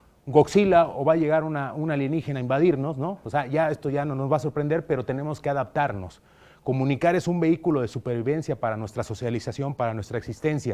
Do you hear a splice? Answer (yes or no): no